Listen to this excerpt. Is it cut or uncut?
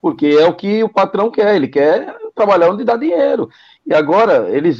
uncut